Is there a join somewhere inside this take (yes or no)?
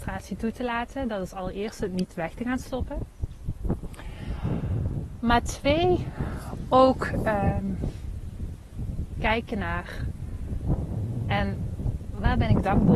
no